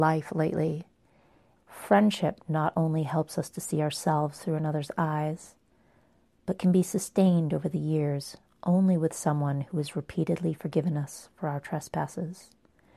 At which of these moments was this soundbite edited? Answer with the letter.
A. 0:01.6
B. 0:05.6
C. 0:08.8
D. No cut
A